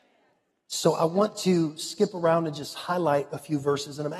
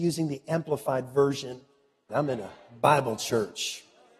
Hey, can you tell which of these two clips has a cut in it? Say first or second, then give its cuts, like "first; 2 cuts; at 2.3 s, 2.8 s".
second; 1 cut; at 2.1 s